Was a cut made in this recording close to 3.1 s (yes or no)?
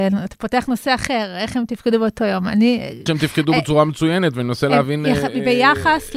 yes